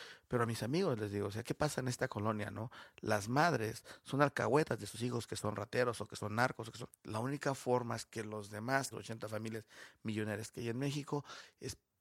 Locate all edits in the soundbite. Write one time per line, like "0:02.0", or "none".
0:06.9
0:08.9